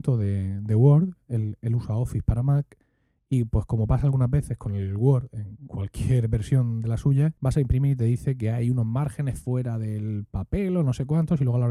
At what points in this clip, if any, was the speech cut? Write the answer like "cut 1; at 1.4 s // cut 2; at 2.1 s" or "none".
cut 1; at 7.4 s